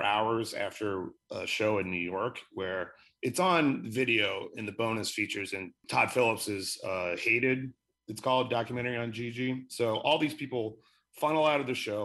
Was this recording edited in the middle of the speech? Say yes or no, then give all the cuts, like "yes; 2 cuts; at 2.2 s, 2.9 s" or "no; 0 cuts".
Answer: no; 0 cuts